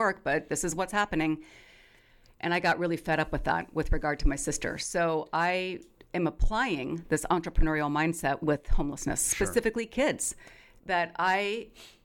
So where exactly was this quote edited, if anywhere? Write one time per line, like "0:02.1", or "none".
0:08.4